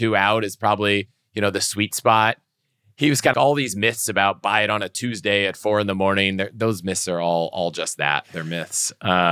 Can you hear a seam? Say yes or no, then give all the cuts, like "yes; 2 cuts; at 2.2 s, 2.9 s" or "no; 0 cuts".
yes; 1 cut; at 3.3 s